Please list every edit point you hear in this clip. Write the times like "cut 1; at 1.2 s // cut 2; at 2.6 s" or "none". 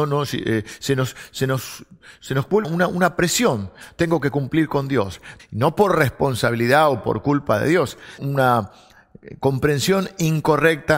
cut 1; at 2.6 s // cut 2; at 5.4 s // cut 3; at 8.2 s